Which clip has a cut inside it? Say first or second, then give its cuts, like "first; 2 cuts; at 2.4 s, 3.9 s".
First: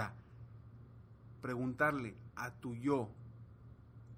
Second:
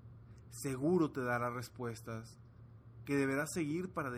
first; 1 cut; at 1.4 s